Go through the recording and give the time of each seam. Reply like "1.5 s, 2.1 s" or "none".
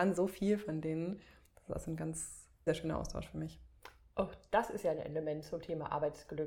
2.7 s